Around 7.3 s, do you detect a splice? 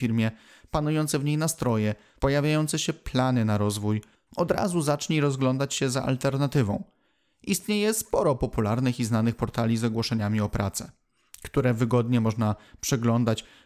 no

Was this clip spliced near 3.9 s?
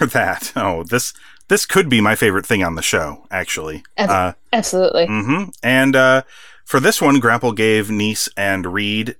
no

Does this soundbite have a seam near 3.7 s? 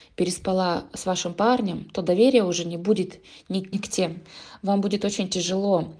yes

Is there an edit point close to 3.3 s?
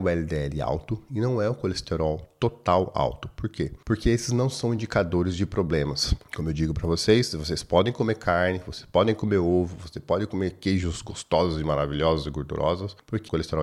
no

